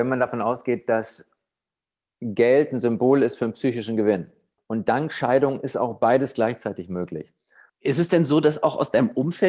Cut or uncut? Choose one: cut